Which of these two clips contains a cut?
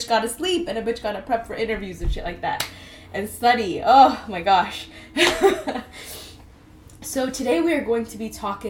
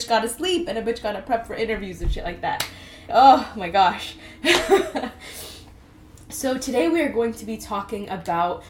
second; 1 cut; at 3.1 s

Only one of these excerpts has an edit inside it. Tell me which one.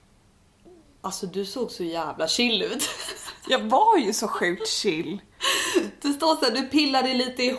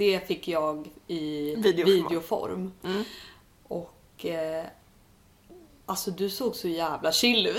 second; 1 cut; at 2.8 s

